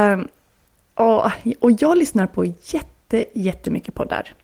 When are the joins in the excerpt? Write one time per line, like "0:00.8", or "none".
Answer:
none